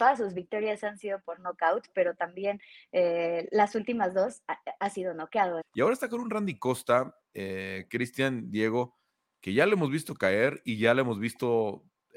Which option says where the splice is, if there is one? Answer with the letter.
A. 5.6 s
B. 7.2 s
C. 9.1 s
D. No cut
A